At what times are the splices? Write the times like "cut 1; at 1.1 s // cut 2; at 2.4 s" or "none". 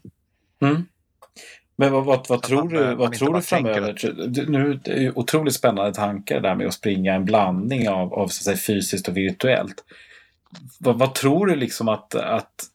none